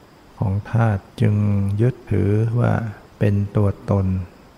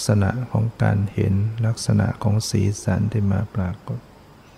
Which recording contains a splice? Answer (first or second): first